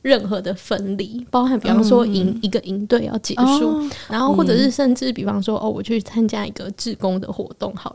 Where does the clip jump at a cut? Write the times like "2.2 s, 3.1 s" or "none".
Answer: 4.1 s